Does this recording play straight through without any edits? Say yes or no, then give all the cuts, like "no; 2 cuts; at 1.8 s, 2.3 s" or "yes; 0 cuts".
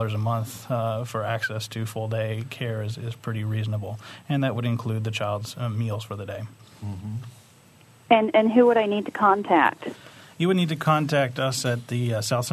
yes; 0 cuts